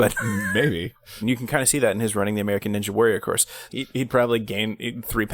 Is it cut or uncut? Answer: cut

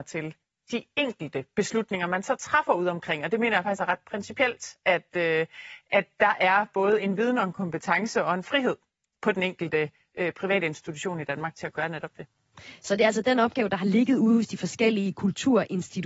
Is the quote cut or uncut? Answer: uncut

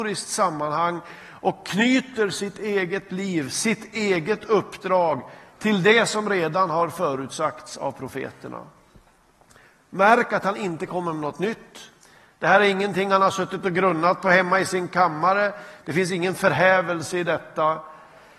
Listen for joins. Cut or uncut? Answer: cut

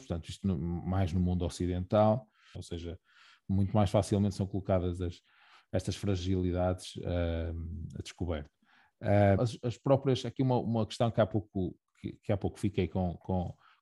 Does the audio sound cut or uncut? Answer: cut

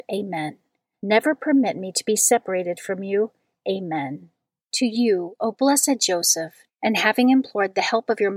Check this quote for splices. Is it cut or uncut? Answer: cut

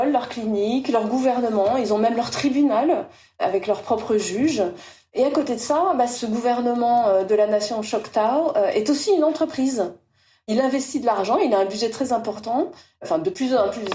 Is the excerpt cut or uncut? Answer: uncut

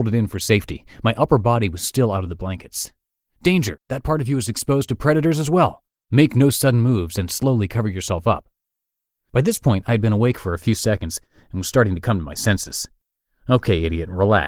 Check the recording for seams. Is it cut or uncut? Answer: uncut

